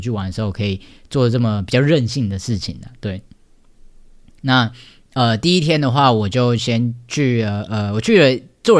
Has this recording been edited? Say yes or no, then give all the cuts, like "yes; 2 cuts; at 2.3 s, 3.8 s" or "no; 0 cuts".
no; 0 cuts